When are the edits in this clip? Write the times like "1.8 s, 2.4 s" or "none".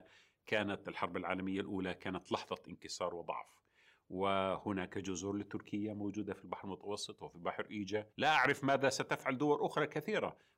8.1 s